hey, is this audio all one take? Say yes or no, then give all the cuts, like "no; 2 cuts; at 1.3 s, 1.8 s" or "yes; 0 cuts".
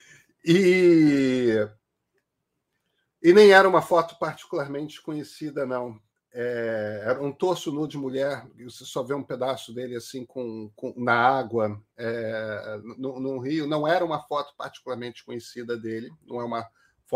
yes; 0 cuts